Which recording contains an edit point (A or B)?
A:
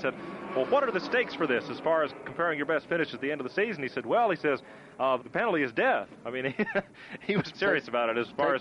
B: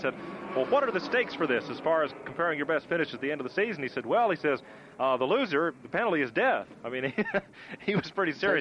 A